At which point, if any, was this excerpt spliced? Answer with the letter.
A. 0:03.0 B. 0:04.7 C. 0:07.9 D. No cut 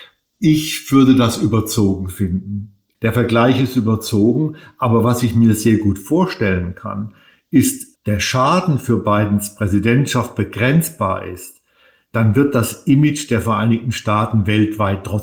C